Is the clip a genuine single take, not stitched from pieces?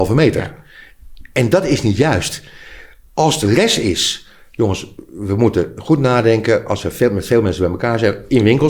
yes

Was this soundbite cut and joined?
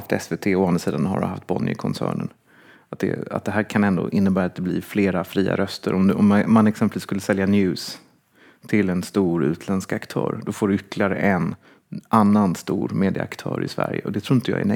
no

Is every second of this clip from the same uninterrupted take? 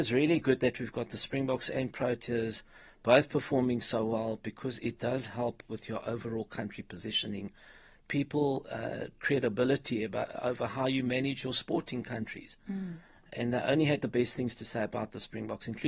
no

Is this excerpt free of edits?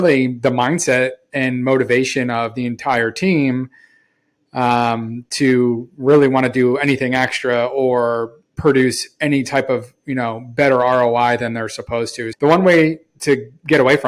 no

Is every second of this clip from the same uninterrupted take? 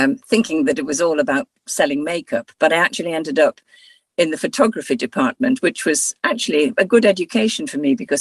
yes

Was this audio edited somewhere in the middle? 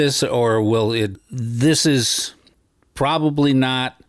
yes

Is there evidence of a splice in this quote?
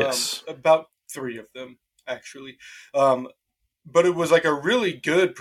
no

